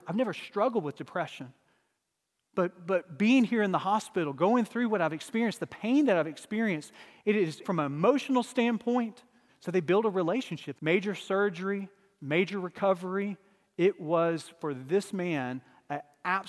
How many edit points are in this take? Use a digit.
3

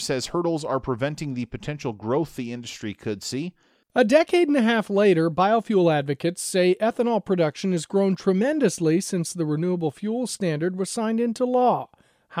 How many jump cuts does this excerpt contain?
1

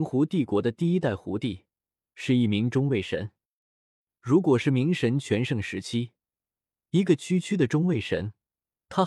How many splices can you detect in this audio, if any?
0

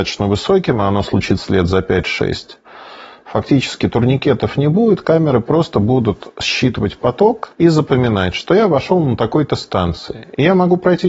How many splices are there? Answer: 1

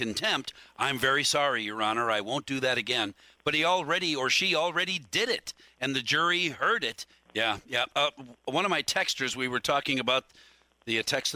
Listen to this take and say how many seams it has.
1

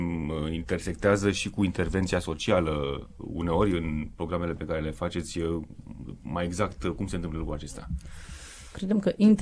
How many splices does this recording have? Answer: 0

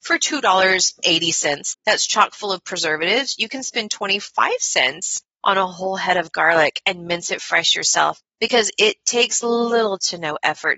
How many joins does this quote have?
1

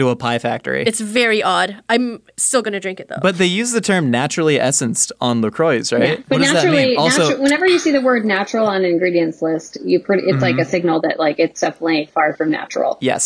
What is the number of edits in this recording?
0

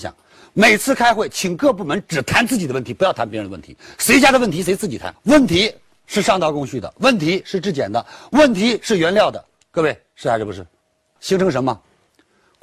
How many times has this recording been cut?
2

